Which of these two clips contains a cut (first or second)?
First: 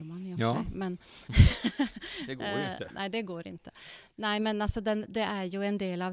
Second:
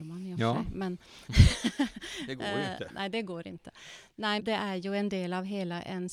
second